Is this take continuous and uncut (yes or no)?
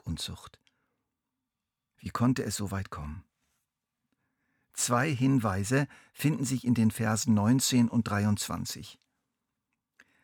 yes